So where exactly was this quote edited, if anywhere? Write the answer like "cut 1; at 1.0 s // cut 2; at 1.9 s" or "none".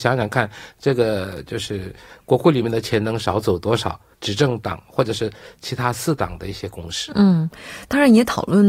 cut 1; at 4.1 s